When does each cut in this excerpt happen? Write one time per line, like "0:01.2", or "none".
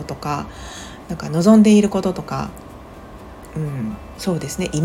none